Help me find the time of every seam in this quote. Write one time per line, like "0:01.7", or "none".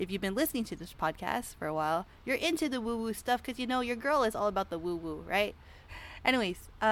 0:05.9